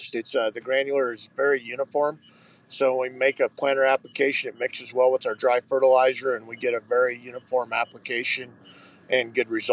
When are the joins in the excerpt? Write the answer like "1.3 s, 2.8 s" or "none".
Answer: none

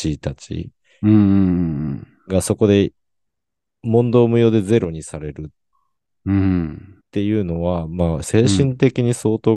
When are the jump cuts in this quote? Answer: 7.0 s, 8.2 s

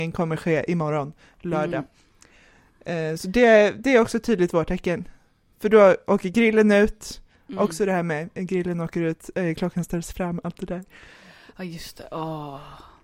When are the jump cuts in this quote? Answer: none

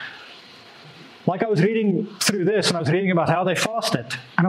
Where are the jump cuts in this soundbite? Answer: 1.2 s

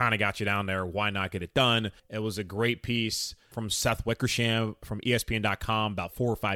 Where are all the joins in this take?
2.0 s, 3.5 s

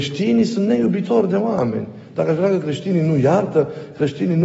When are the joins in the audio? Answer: none

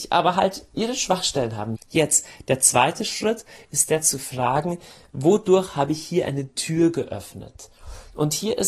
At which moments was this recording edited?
1.8 s

